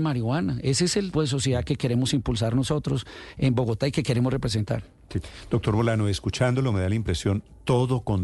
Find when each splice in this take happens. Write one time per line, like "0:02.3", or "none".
0:01.1